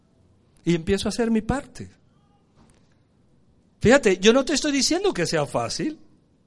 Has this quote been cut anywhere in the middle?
no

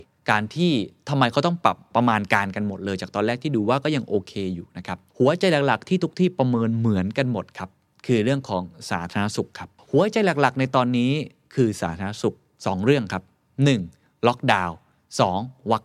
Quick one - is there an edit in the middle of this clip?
no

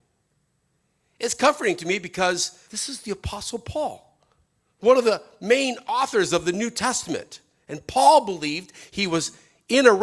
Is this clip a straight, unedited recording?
no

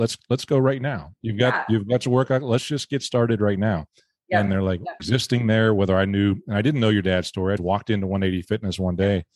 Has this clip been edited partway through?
yes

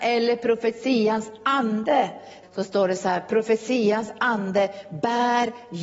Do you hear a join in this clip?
yes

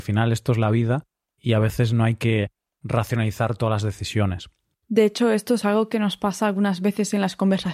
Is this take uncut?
yes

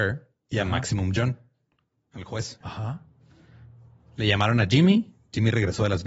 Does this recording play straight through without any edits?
no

